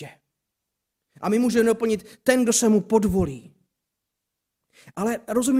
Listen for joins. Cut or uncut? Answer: uncut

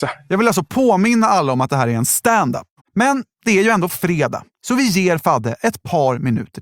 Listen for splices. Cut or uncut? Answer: cut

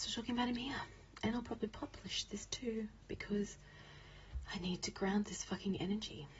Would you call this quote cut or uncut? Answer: uncut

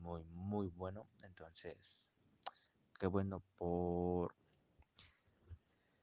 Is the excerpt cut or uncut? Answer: uncut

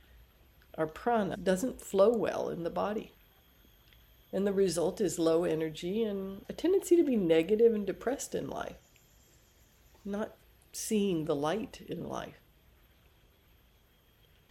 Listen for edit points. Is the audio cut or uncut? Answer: cut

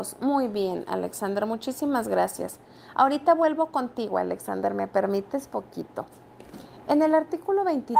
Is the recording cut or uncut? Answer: uncut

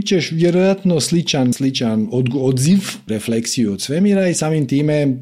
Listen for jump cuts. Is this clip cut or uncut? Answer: cut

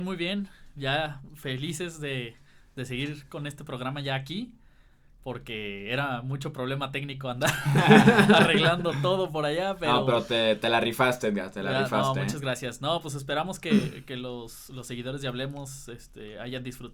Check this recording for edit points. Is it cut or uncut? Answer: uncut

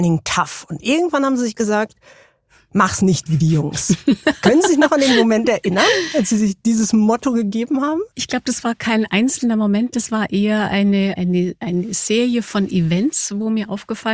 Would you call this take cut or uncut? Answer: cut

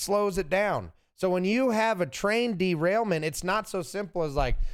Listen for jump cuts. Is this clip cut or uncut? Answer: uncut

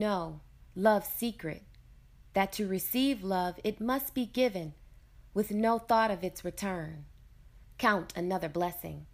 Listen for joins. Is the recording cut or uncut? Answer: cut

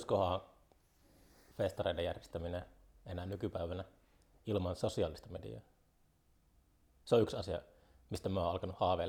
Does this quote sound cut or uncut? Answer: uncut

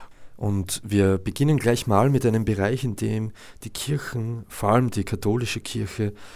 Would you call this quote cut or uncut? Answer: uncut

